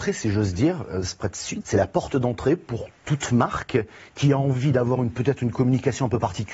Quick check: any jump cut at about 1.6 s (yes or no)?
yes